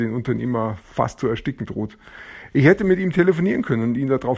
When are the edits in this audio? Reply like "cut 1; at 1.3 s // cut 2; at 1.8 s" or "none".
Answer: none